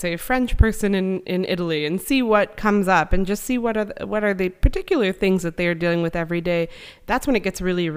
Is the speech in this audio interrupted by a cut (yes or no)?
no